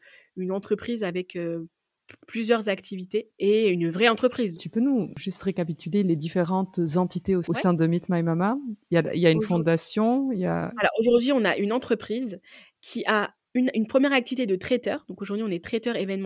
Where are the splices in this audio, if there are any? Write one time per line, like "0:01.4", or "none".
0:03.3
0:04.5

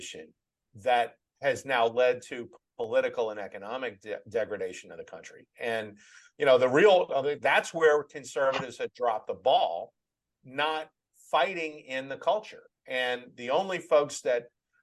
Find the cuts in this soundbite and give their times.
none

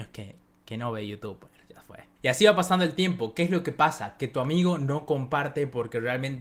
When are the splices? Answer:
none

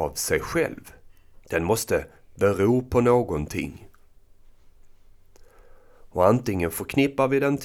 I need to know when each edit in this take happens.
0:01.4

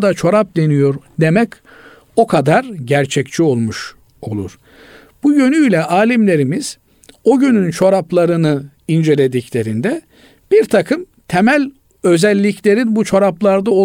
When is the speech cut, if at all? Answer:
none

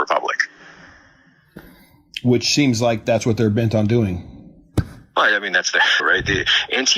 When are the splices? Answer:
0:06.0

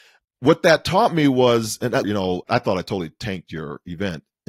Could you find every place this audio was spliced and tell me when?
0:02.0

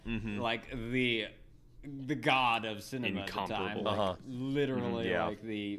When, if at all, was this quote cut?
none

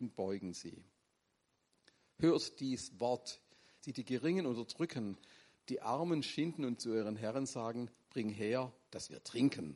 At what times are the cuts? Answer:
0:03.8

